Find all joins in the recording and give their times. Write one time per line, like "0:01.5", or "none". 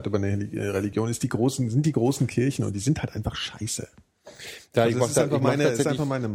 none